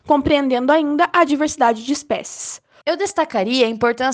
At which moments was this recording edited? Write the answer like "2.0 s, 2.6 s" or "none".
2.8 s